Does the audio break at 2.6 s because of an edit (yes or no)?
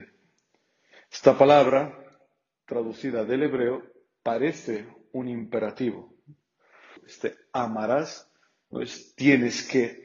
no